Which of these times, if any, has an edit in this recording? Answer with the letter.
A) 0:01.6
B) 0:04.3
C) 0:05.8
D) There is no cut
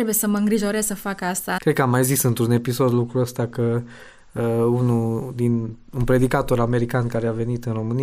A